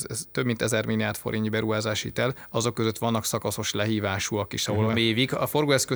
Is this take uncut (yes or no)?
no